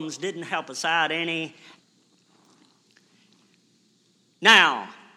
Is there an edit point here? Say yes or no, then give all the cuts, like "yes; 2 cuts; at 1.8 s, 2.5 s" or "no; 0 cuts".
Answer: yes; 1 cut; at 1.8 s